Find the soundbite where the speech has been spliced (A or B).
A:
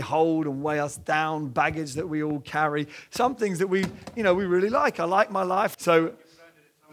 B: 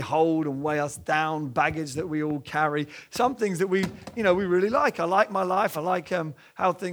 A